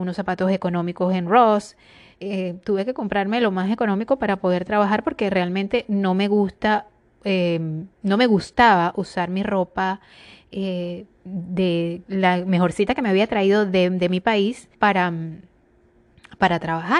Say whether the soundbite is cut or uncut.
cut